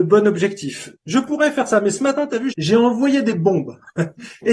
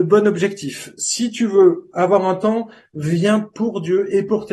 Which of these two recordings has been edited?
first; 2 cuts; at 1.0 s, 2.5 s

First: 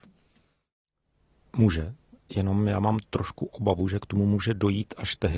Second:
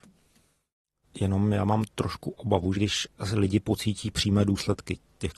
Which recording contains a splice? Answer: second; 2 cuts; at 1.0 s, 2.7 s

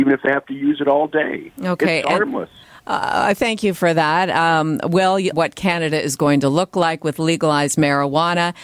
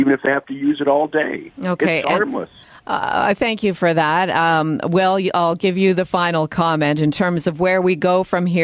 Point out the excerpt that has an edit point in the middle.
first; 1 cut; at 5.3 s

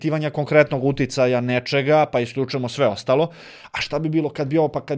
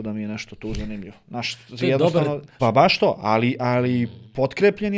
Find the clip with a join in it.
second; 1 cut; at 2.6 s

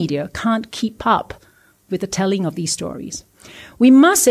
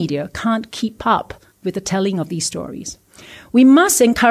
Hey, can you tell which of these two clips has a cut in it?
second; 1 cut; at 1.5 s

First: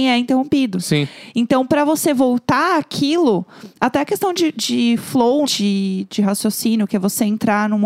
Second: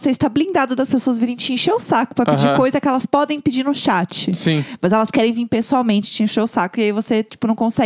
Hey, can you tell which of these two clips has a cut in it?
first; 1 cut; at 5.5 s

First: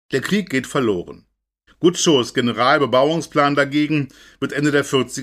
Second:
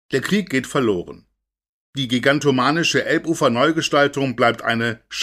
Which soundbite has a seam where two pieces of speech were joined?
first; 1 cut; at 1.7 s

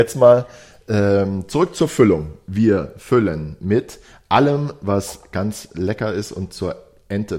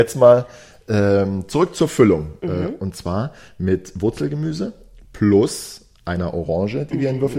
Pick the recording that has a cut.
second; 1 cut; at 2.4 s

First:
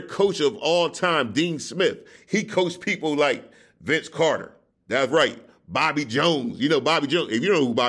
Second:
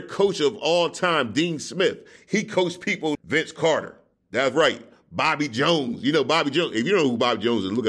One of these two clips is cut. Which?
second; 1 cut; at 3.1 s

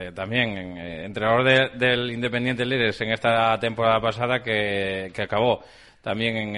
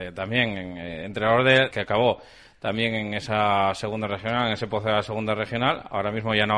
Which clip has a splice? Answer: second; 1 cut; at 1.7 s

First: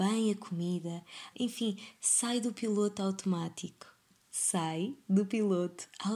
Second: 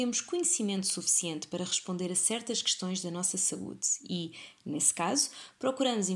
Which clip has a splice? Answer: first; 1 cut; at 1.3 s

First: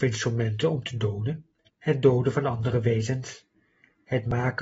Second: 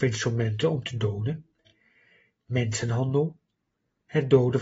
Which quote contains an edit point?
first; 1 cut; at 1.7 s

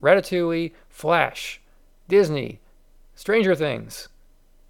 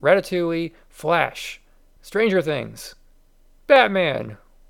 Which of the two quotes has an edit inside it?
second; 1 cut; at 2.0 s

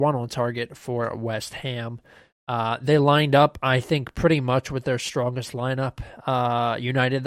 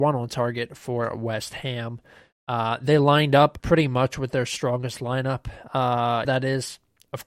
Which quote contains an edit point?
second; 2 cuts; at 3.6 s, 6.3 s

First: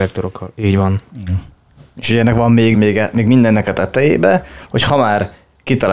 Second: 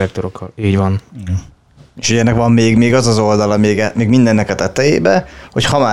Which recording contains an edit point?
first; 1 cut; at 2.7 s

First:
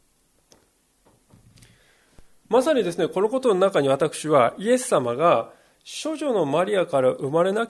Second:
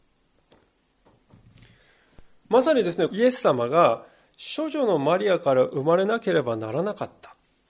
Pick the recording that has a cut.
second; 1 cut; at 3.1 s

